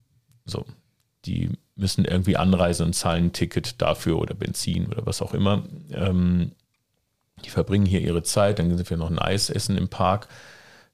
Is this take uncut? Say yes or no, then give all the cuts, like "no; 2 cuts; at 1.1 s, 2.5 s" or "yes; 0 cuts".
yes; 0 cuts